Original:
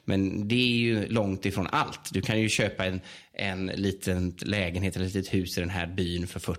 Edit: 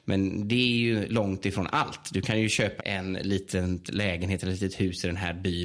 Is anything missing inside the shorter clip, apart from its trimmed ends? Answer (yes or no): yes